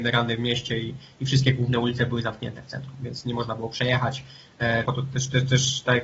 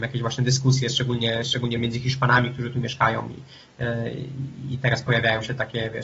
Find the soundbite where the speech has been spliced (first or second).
first